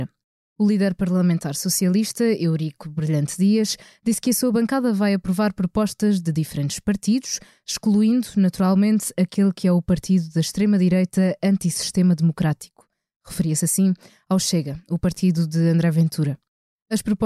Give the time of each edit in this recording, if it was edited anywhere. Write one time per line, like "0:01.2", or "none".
none